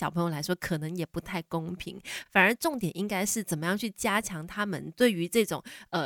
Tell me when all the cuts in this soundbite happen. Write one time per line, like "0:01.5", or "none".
none